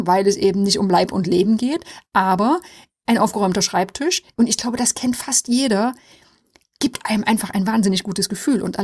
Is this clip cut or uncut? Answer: uncut